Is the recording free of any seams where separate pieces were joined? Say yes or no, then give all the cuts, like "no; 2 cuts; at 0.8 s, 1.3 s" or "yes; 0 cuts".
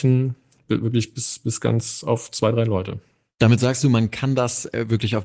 yes; 0 cuts